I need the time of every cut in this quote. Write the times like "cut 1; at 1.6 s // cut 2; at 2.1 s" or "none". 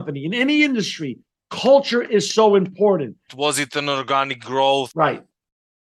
cut 1; at 3.3 s